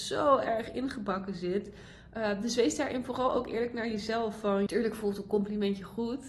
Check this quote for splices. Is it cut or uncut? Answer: cut